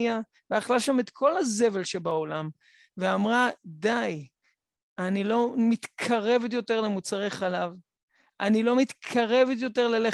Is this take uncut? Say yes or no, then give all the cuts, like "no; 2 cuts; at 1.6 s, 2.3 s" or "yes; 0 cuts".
yes; 0 cuts